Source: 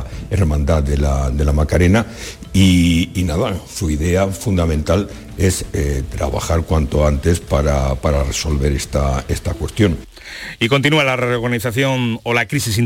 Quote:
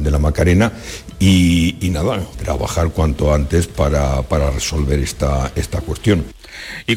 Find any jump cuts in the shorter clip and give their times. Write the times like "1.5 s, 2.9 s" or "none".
2.3 s